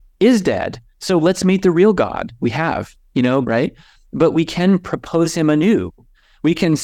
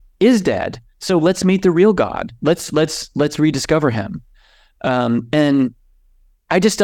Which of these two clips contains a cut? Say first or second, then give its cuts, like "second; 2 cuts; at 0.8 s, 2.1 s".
first; 2 cuts; at 2.4 s, 3.4 s